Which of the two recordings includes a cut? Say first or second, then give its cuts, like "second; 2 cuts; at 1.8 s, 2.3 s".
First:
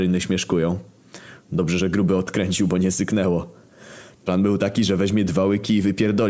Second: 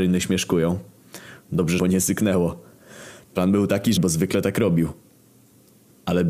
second; 2 cuts; at 1.8 s, 4.0 s